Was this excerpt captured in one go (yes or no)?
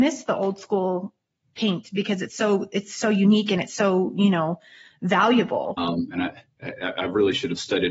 no